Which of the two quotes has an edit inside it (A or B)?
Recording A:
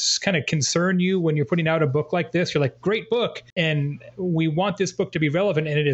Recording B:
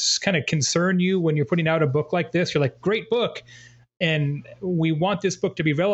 A